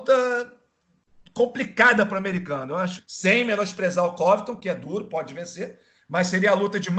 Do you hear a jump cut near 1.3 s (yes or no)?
no